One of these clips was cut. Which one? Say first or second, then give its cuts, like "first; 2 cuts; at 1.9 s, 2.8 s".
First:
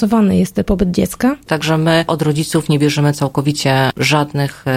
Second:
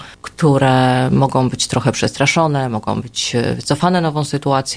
first; 1 cut; at 1.5 s